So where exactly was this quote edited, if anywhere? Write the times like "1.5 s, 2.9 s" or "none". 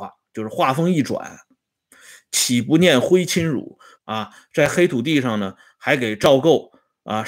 4.0 s